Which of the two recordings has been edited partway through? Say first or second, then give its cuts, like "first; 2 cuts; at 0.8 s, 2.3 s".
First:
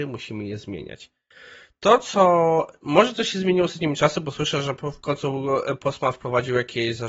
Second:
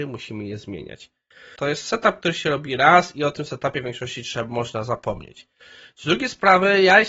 second; 1 cut; at 1.6 s